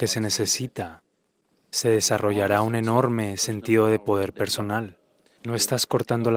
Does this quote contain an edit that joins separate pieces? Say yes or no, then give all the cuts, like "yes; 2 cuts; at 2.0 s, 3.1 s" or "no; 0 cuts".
yes; 1 cut; at 5.4 s